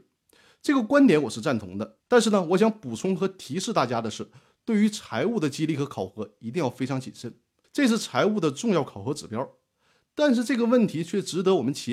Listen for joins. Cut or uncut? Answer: cut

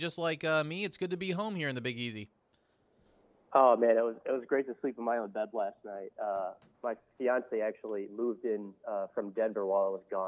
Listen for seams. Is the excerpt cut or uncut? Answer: uncut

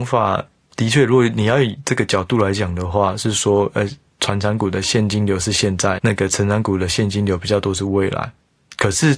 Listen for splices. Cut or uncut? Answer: cut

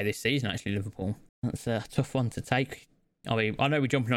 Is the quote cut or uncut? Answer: cut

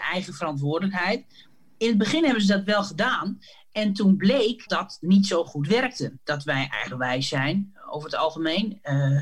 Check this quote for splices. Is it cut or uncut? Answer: cut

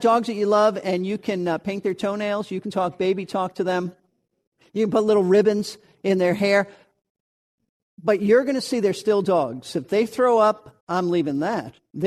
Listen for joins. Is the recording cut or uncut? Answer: cut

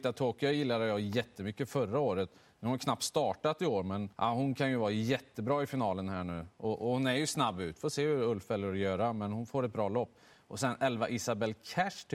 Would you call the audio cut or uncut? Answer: cut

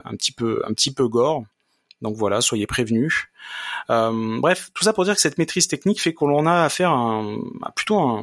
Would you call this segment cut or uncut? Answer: uncut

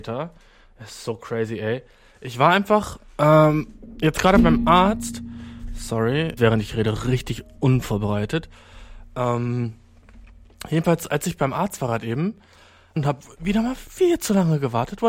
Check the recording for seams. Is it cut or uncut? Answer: cut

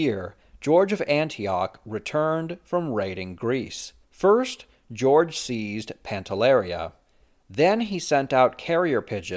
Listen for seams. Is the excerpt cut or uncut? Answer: cut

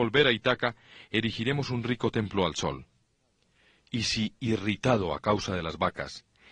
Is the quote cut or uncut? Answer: uncut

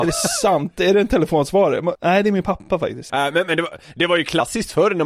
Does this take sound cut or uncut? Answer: cut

